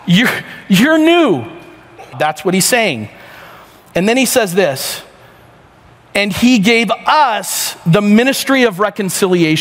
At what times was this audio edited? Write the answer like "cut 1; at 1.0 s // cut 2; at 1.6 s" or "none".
cut 1; at 2.1 s